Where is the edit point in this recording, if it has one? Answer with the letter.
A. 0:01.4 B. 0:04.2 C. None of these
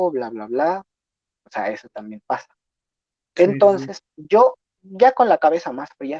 C